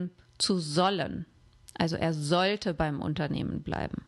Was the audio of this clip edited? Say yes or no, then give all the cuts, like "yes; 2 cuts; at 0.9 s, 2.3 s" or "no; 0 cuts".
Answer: no; 0 cuts